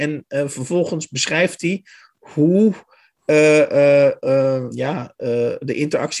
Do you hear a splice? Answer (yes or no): yes